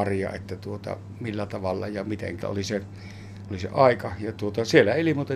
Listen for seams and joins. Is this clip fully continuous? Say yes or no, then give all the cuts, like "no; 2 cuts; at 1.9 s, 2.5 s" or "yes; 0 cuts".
no; 2 cuts; at 2.4 s, 3.5 s